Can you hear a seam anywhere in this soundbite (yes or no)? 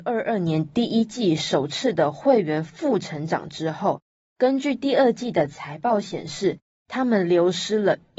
no